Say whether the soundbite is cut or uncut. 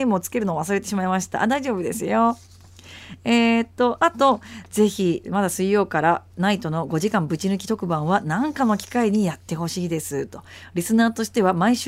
cut